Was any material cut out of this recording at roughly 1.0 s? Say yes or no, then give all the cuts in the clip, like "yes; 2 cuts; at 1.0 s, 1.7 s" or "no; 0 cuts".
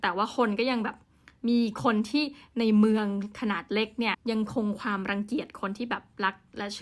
no; 1 cut; at 4.1 s